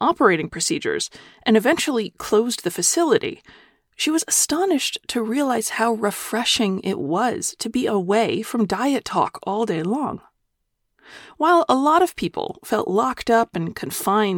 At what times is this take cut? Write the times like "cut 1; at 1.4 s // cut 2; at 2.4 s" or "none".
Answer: none

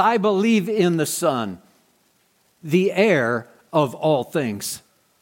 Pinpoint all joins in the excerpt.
cut 1; at 2.6 s

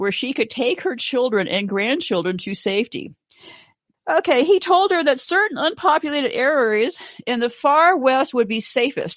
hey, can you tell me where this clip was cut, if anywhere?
cut 1; at 3.9 s

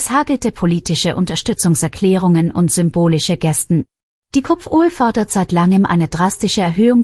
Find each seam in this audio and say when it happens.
cut 1; at 4.1 s

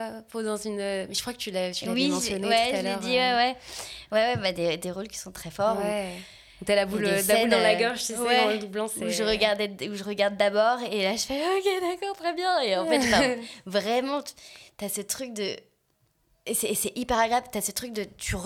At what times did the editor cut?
none

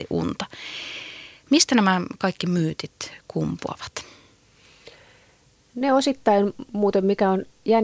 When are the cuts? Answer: none

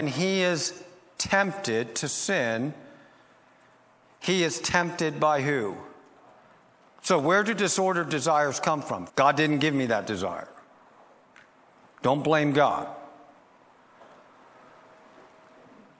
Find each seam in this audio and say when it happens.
cut 1; at 6.8 s // cut 2; at 9.1 s

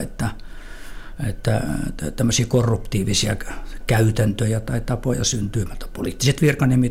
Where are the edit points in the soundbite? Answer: none

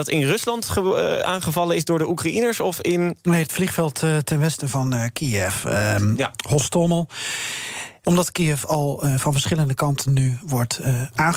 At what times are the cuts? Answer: cut 1; at 8.0 s

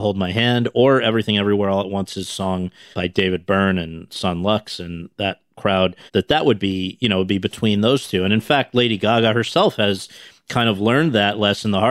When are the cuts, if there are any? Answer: cut 1; at 2.9 s // cut 2; at 6.1 s

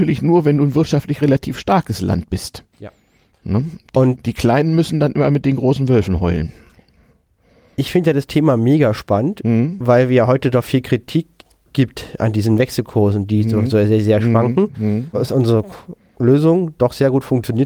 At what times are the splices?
cut 1; at 2.7 s // cut 2; at 15.1 s

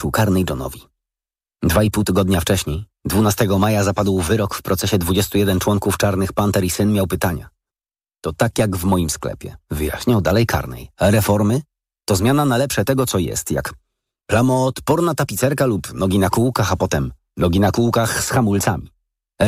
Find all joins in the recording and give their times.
none

